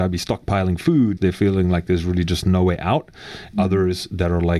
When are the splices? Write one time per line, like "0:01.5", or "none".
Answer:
0:01.2
0:03.5